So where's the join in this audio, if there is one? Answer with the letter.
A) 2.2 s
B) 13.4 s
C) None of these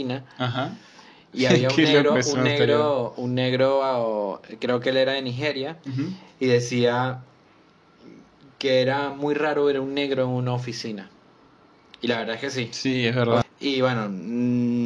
B